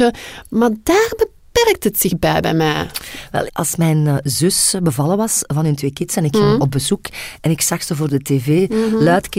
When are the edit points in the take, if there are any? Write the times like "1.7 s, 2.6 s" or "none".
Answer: 3.5 s